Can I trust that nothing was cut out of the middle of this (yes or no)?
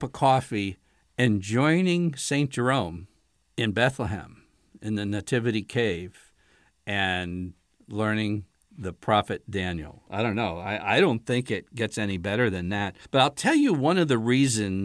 no